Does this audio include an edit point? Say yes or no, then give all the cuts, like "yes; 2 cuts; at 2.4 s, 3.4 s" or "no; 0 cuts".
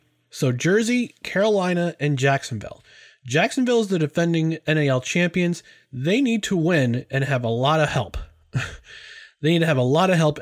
no; 0 cuts